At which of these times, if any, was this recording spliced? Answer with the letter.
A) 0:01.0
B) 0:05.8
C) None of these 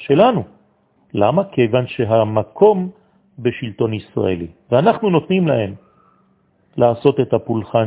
A